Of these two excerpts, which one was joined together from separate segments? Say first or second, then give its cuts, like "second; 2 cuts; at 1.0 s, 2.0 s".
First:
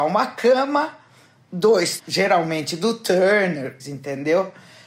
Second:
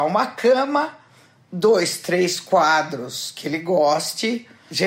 first; 2 cuts; at 2.0 s, 3.8 s